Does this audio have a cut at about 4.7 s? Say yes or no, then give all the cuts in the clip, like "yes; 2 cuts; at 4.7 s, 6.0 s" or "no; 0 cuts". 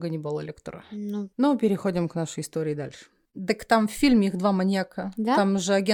no; 2 cuts; at 1.3 s, 3.3 s